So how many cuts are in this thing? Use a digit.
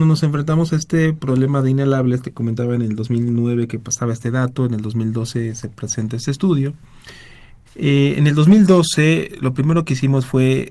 1